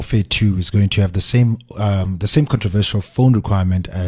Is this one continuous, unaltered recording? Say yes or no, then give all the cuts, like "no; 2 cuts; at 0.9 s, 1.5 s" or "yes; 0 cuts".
yes; 0 cuts